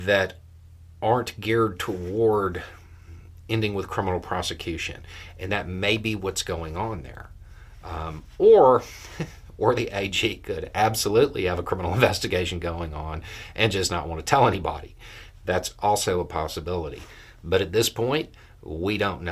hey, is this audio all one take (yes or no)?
yes